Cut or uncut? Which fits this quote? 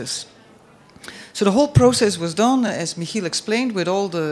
uncut